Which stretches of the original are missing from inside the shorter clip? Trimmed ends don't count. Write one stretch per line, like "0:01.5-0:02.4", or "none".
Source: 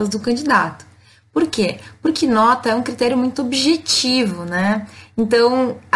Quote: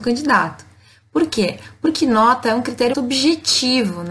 0:03.1-0:03.3